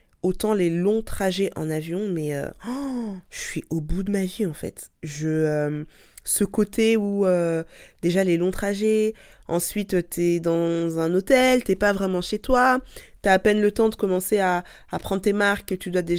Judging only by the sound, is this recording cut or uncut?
uncut